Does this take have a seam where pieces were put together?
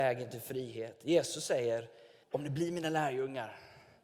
yes; 1 cut; at 2.2 s

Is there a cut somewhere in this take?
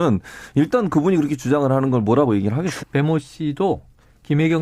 yes; 1 cut; at 2.8 s

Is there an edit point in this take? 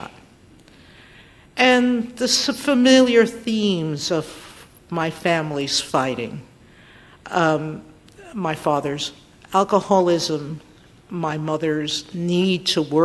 no; 0 cuts

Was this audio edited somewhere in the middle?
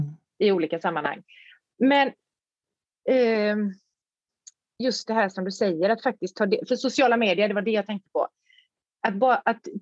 no; 0 cuts

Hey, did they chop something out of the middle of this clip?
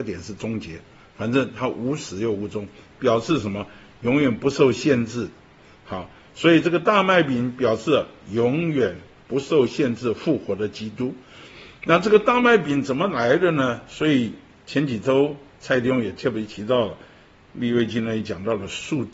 no; 0 cuts

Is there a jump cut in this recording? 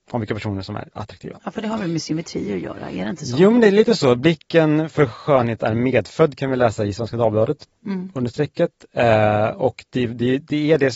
no; 0 cuts

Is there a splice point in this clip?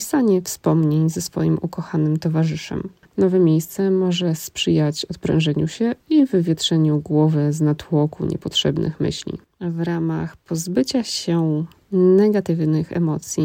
yes; 1 cut; at 3.1 s

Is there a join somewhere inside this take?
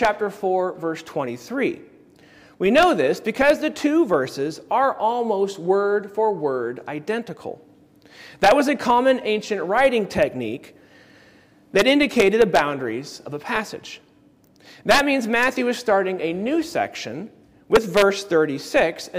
no; 0 cuts

